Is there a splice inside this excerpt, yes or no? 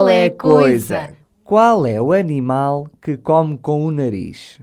yes